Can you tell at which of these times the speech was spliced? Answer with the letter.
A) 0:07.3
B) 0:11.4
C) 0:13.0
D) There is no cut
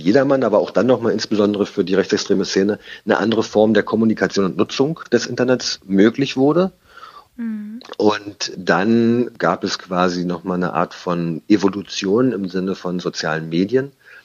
A